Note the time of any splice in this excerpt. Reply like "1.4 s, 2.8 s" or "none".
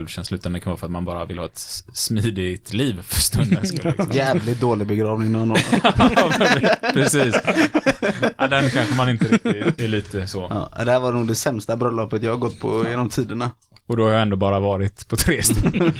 9.8 s